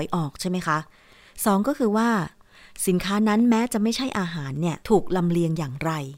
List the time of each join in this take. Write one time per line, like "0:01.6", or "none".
0:04.8